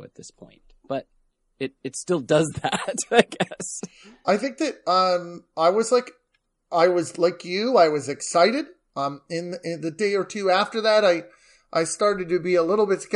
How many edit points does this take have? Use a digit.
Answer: 0